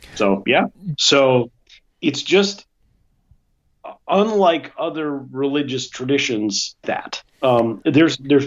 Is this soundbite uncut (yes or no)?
no